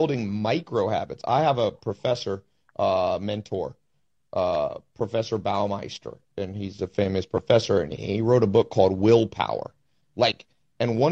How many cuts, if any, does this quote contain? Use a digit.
0